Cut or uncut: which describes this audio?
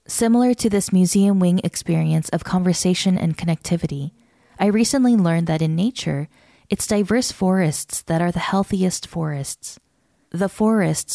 uncut